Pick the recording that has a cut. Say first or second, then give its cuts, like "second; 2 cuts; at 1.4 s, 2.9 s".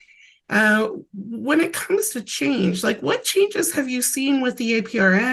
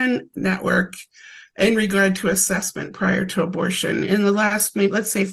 first; 1 cut; at 1.1 s